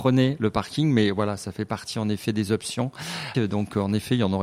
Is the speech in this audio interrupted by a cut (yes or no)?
yes